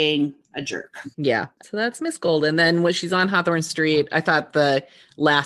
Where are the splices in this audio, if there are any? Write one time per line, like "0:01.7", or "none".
0:01.1

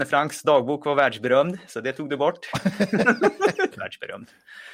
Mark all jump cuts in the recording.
0:03.7

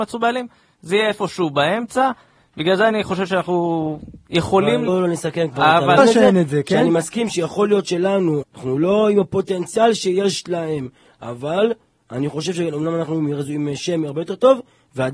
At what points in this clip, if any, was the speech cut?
0:04.9
0:06.0
0:08.4

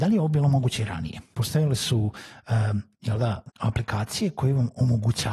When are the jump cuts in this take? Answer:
0:01.3
0:03.5

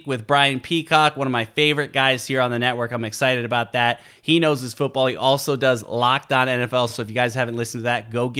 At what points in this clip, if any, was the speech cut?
none

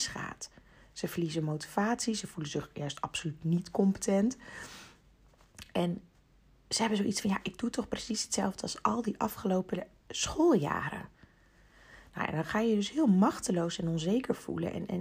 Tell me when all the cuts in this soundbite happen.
none

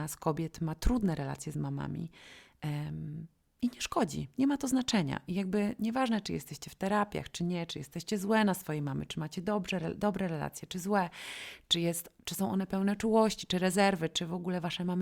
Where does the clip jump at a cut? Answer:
none

